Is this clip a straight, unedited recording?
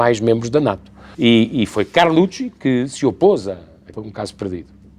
no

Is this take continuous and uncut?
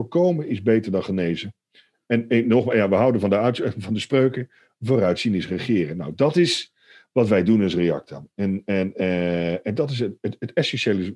yes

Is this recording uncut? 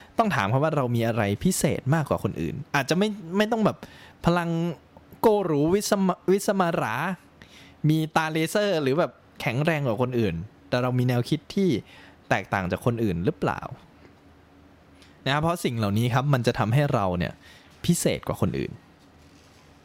yes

